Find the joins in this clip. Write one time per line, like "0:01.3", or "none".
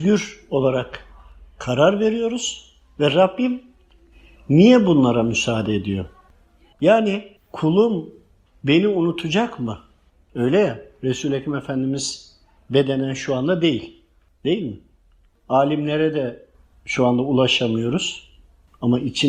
0:06.7